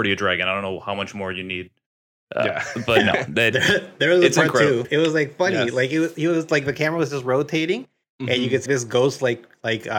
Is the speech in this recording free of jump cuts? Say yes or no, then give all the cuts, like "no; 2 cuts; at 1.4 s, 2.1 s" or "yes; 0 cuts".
no; 2 cuts; at 4.8 s, 8.7 s